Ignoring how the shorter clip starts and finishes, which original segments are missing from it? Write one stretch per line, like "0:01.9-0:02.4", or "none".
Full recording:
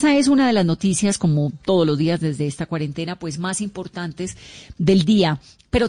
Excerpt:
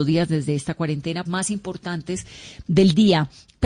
0:03.2-0:03.4